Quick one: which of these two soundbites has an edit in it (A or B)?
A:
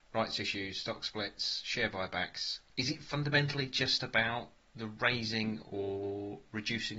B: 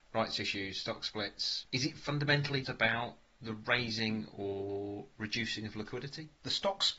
B